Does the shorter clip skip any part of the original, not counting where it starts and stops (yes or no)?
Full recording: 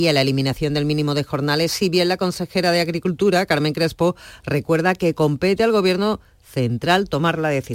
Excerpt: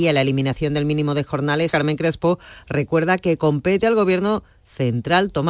yes